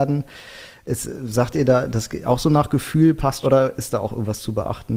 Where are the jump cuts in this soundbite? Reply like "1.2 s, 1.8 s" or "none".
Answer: 3.4 s